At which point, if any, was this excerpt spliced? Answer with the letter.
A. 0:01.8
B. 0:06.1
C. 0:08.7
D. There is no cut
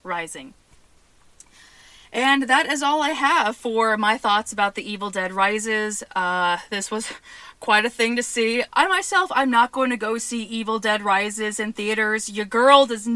C